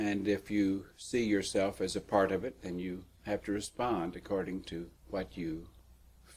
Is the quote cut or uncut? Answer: cut